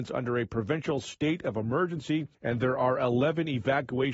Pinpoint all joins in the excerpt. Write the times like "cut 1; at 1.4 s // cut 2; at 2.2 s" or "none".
cut 1; at 2.3 s